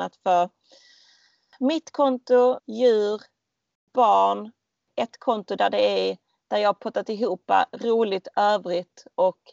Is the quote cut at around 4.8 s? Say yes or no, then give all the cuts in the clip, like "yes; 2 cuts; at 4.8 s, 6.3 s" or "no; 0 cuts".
no; 1 cut; at 2.6 s